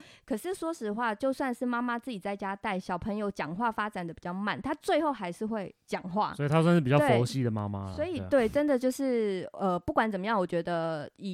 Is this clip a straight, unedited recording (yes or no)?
yes